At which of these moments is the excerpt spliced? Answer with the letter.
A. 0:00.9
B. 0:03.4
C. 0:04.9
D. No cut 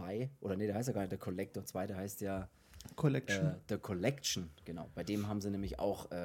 D